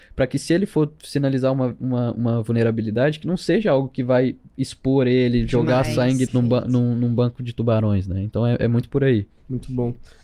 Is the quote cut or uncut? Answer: cut